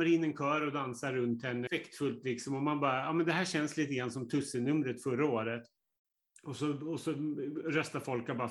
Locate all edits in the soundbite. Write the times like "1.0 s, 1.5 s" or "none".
1.7 s